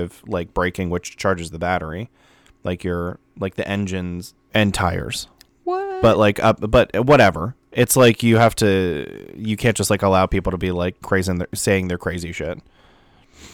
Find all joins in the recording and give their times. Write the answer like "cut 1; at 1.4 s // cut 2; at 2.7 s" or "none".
cut 1; at 4.3 s